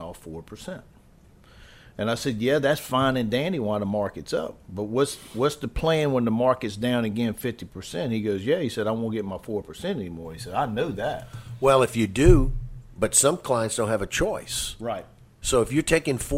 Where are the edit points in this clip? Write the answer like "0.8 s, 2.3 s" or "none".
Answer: none